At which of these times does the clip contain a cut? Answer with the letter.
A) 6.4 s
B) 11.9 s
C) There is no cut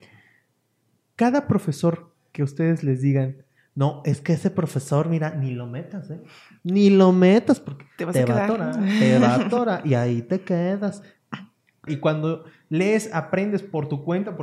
B